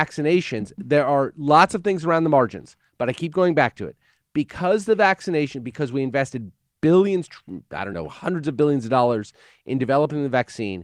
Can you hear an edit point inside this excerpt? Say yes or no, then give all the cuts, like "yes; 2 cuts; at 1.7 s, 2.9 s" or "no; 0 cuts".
yes; 1 cut; at 7.9 s